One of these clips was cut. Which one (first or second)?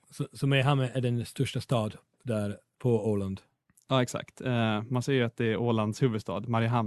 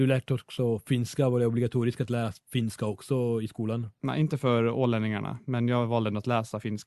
first